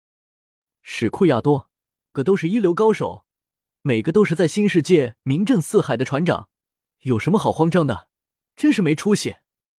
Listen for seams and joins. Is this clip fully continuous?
no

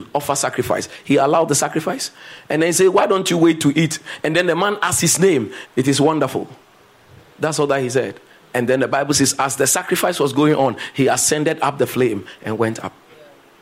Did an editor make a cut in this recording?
yes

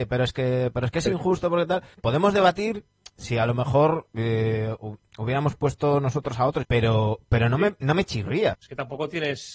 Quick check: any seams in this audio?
yes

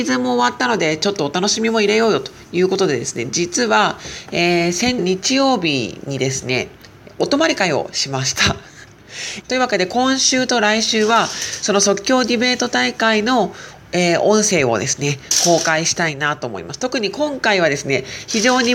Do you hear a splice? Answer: yes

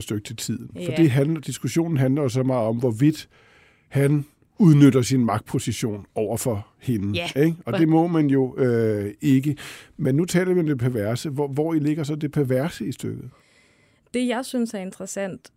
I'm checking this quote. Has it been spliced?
no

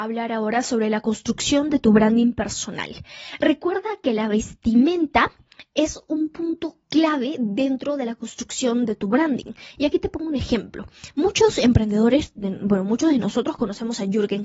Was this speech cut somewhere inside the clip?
no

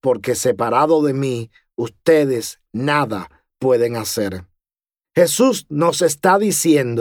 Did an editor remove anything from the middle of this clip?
no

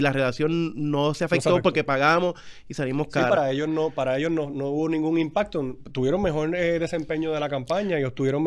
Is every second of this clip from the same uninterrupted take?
yes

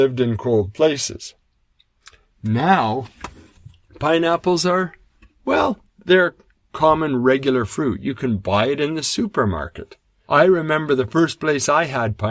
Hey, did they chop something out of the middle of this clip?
yes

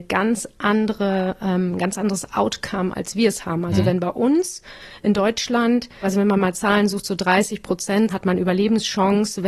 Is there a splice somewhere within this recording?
yes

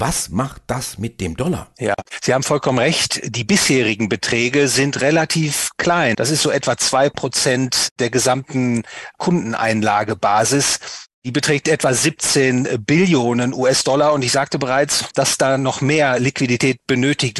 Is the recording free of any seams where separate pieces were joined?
no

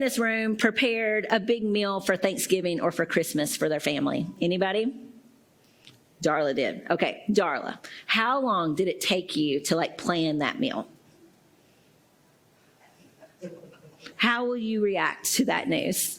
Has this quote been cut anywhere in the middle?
yes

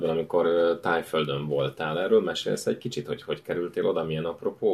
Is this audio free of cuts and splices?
yes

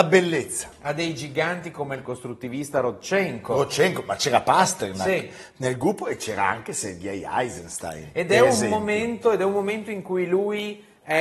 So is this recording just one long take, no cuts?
yes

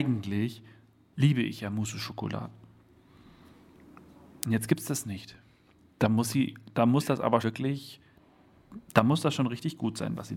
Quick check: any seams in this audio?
yes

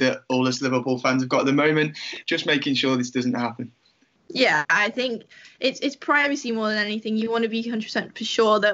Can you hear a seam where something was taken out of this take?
yes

